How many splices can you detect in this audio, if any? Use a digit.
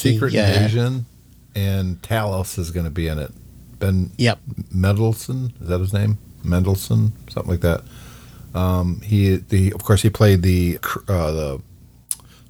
1